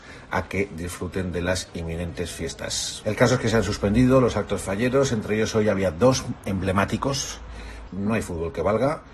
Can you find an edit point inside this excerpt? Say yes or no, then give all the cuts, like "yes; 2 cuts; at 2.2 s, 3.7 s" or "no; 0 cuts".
yes; 2 cuts; at 3.0 s, 7.9 s